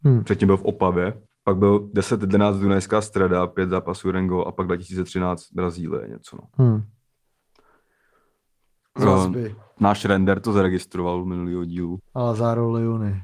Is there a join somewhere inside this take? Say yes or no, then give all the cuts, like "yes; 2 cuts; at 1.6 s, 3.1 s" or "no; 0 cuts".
yes; 3 cuts; at 1.3 s, 8.8 s, 12.0 s